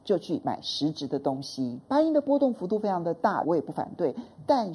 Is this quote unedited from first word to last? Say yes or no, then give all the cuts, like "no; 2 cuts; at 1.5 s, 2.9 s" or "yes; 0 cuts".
no; 2 cuts; at 1.8 s, 3.4 s